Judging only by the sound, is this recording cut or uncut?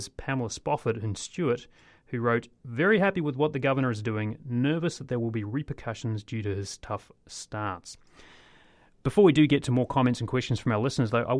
uncut